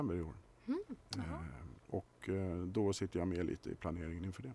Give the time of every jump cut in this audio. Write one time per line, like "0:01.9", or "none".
0:01.8